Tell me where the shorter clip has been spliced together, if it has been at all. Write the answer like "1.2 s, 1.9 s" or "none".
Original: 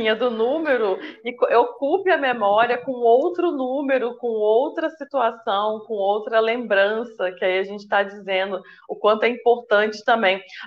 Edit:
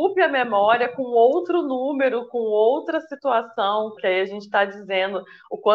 4.0 s